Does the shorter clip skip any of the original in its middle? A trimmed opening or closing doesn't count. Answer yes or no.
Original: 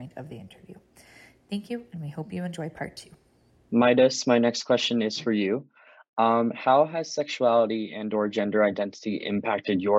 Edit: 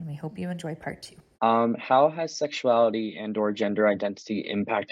yes